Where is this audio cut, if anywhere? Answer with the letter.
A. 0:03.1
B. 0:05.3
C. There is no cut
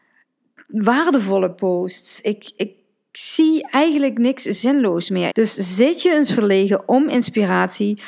B